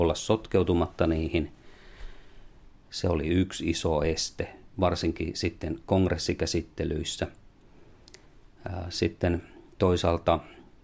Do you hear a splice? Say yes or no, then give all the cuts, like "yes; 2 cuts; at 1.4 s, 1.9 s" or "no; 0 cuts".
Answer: no; 0 cuts